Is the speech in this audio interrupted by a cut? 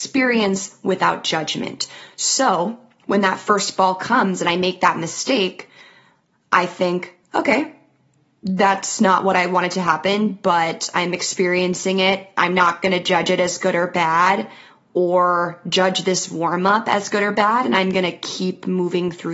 no; 0 cuts

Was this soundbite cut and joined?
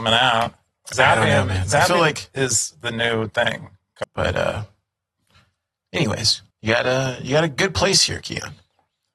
yes; 2 cuts; at 4.0 s, 6.5 s

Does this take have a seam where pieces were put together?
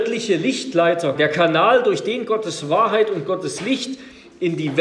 yes; 1 cut; at 1.2 s

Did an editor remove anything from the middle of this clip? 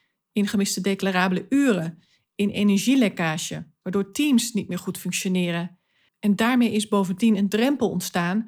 yes; 2 cuts; at 3.8 s, 6.1 s

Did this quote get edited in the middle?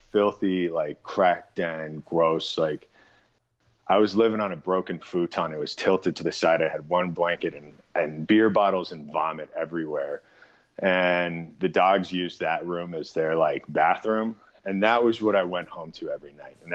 yes; 1 cut; at 8.3 s

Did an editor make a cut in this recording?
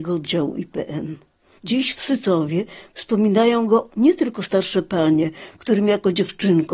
yes; 1 cut; at 1.6 s

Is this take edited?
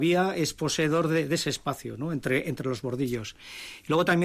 no; 0 cuts

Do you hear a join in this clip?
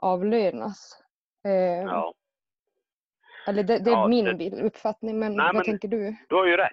no; 0 cuts

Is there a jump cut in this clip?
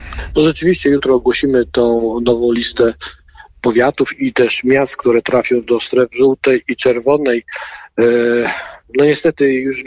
no; 0 cuts

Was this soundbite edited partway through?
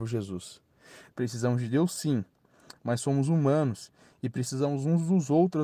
yes; 1 cut; at 1.1 s

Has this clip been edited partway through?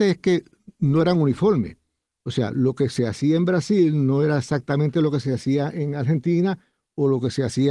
no; 0 cuts

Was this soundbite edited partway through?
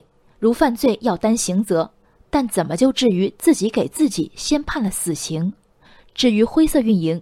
no; 0 cuts

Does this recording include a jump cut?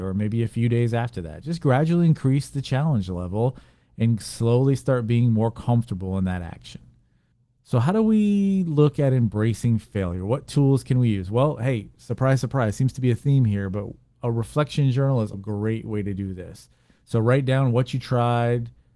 yes; 1 cut; at 15.3 s

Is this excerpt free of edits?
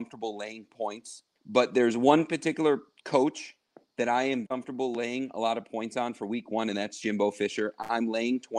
no; 2 cuts; at 1.3 s, 4.4 s

